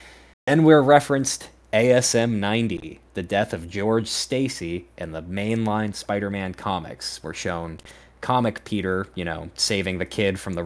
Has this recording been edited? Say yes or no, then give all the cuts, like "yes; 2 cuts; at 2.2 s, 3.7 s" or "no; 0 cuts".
no; 0 cuts